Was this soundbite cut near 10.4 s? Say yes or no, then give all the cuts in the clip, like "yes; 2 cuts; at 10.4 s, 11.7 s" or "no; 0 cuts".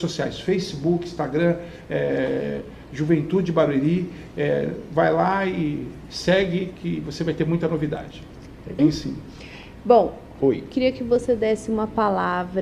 yes; 2 cuts; at 8.8 s, 10.4 s